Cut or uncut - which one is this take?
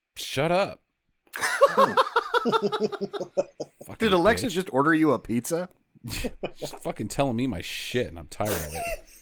uncut